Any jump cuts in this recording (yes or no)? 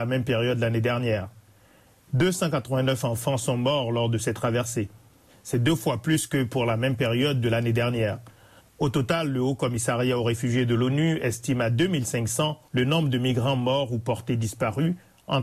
yes